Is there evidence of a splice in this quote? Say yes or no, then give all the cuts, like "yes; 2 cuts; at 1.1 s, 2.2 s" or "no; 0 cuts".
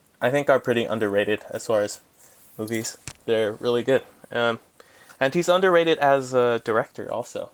no; 0 cuts